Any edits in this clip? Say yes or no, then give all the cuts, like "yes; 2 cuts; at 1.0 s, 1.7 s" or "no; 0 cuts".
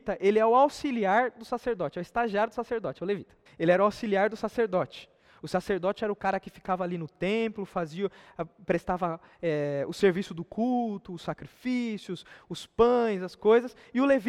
yes; 1 cut; at 3.5 s